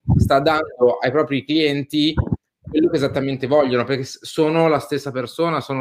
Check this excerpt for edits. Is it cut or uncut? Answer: uncut